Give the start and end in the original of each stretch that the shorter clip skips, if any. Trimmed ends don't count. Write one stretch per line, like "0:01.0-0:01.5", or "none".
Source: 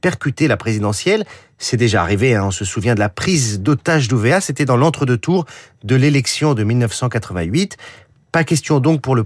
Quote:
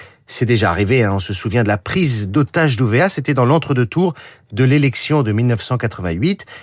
none